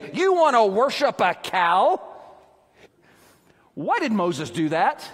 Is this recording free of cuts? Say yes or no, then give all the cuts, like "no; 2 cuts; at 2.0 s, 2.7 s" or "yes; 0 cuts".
no; 1 cut; at 2.9 s